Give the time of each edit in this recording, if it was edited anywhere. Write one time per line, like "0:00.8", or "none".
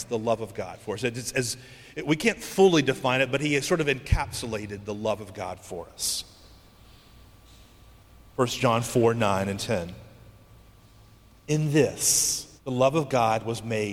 0:12.6